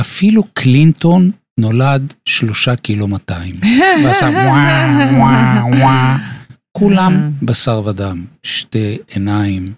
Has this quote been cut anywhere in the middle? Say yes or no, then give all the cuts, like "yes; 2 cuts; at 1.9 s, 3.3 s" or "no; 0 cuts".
no; 0 cuts